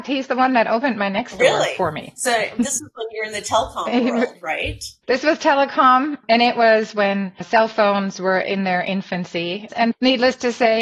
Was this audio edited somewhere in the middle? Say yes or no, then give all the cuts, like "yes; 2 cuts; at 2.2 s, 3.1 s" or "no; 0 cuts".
yes; 2 cuts; at 5.0 s, 9.7 s